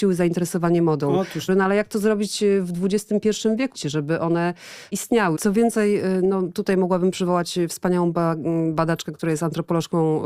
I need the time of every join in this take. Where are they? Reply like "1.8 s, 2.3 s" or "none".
1.5 s, 3.7 s, 5.4 s